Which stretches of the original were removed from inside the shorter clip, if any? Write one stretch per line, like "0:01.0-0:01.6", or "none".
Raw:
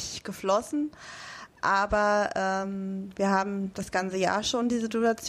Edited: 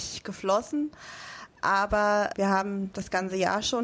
0:02.3-0:03.1